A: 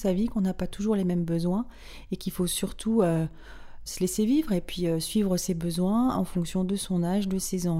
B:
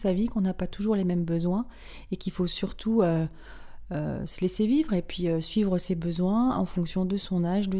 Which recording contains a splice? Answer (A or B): A